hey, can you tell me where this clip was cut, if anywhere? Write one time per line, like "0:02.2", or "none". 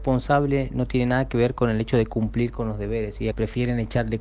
0:03.3